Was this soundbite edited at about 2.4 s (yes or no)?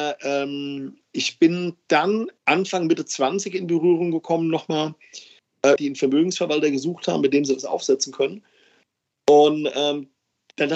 yes